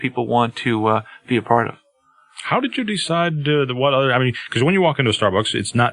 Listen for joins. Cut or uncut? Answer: uncut